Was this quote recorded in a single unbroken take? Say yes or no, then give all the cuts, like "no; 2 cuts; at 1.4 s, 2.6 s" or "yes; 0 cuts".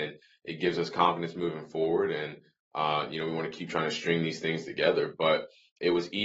yes; 0 cuts